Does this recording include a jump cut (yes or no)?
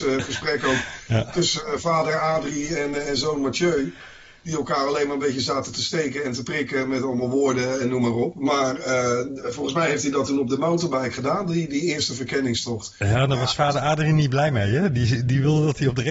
no